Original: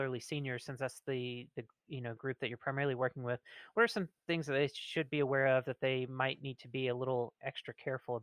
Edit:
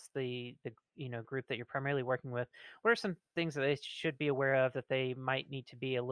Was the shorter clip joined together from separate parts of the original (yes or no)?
no